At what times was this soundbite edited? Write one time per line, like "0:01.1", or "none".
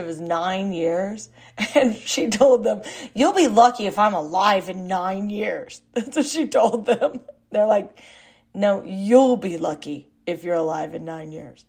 none